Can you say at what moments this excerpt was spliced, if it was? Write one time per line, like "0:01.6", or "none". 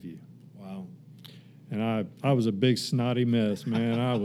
0:02.2